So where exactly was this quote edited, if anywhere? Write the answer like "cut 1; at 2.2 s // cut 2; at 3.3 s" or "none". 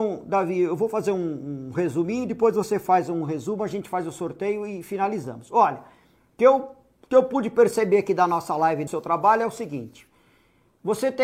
cut 1; at 8.9 s